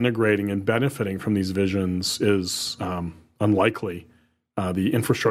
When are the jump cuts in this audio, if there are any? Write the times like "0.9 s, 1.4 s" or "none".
none